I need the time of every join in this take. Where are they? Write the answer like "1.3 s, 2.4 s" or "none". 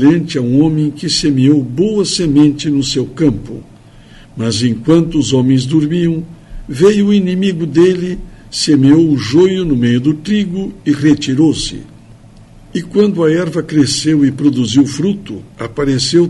none

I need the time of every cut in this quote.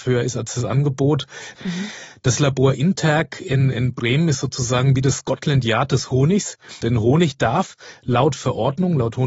1.5 s, 6.8 s

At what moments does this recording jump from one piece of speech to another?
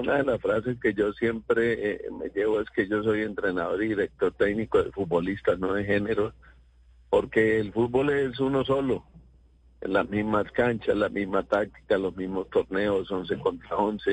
none

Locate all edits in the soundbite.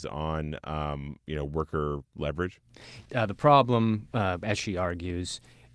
3.1 s

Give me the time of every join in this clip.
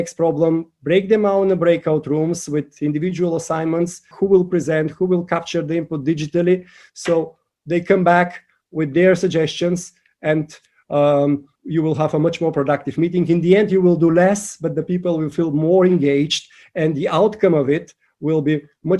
4.1 s, 11.6 s

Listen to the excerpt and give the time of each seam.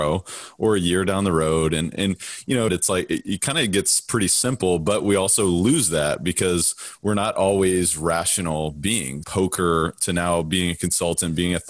2.7 s, 9.2 s

